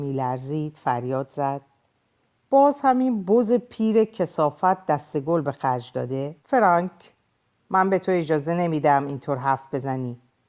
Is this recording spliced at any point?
yes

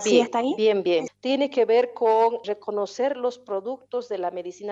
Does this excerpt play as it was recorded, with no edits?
no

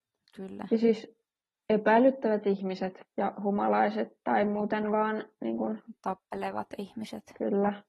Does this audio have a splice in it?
no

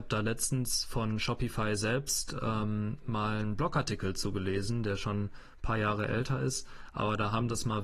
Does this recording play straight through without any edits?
yes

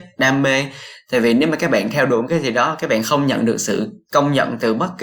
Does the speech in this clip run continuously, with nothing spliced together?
yes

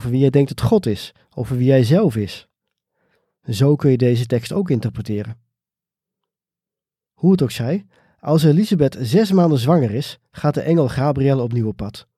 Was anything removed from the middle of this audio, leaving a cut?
no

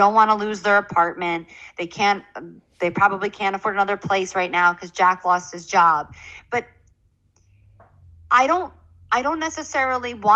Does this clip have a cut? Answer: no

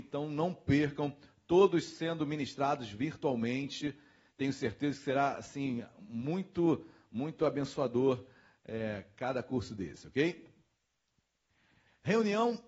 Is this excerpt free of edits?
yes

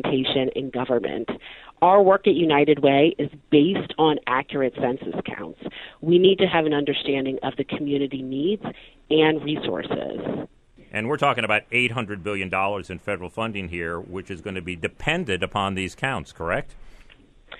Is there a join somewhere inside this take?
yes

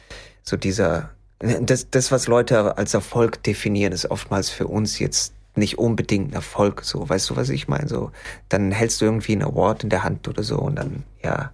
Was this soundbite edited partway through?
no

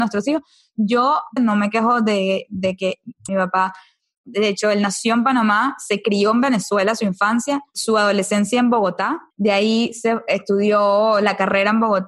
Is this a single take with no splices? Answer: no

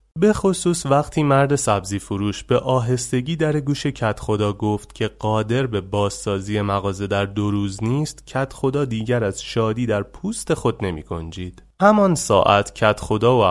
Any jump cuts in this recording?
yes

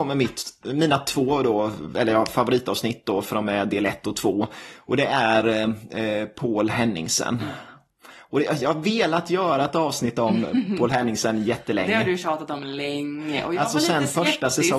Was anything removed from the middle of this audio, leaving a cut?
no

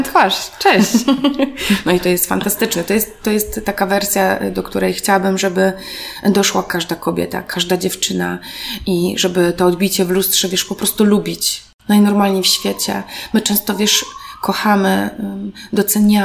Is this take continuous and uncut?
yes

